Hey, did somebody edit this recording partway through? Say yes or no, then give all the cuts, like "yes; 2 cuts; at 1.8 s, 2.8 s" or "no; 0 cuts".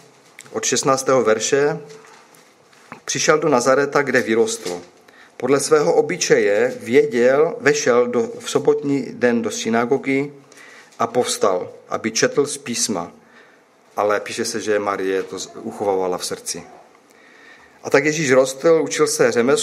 yes; 2 cuts; at 3.0 s, 13.8 s